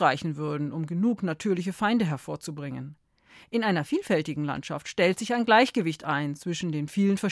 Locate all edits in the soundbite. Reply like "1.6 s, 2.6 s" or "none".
none